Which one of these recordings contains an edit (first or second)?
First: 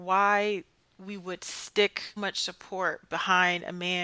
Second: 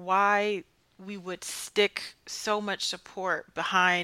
first